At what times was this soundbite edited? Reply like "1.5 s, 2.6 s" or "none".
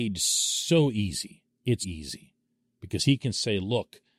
1.8 s